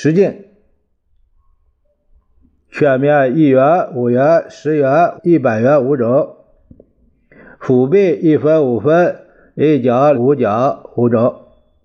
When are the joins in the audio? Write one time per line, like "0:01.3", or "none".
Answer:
0:05.2
0:10.1